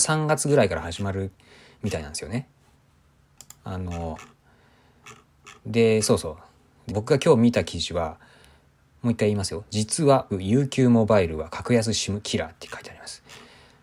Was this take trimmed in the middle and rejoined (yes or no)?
yes